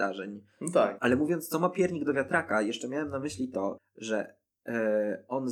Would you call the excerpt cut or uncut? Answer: cut